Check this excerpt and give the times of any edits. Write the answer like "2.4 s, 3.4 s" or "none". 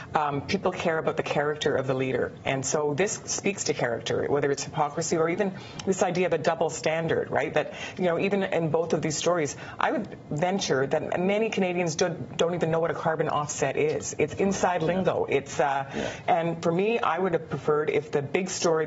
16.2 s